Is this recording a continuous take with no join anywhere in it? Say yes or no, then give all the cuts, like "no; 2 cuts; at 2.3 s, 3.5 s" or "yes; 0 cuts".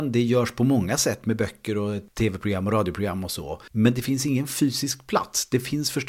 yes; 0 cuts